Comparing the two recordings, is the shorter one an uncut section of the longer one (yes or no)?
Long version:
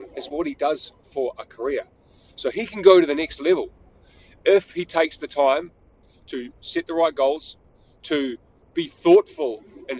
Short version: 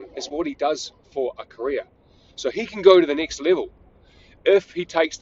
yes